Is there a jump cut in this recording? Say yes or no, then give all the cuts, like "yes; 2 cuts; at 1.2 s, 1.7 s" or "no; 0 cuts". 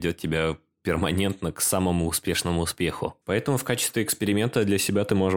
yes; 1 cut; at 3.2 s